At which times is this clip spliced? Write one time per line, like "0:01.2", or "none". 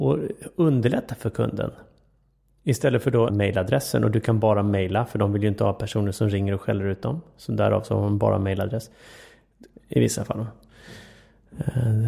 0:03.3
0:09.7